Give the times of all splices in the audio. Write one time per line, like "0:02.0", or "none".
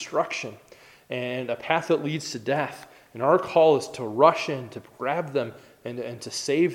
none